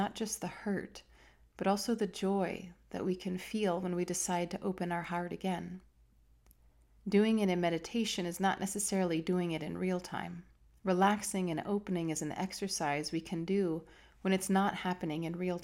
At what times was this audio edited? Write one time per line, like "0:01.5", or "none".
0:07.0
0:10.7